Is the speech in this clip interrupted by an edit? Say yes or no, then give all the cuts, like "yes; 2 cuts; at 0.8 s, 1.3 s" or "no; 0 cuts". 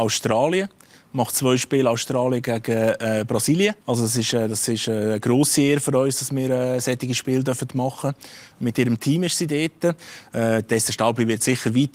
yes; 1 cut; at 3.8 s